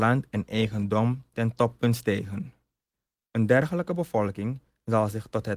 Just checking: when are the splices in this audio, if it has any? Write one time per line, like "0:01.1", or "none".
none